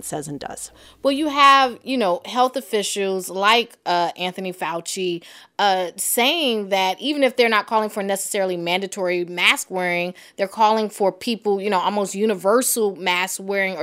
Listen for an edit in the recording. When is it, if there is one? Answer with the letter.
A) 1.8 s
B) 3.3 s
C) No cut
C